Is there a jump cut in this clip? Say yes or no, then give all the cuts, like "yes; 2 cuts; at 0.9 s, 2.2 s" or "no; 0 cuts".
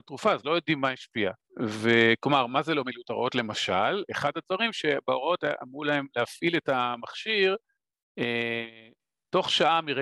yes; 1 cut; at 1.4 s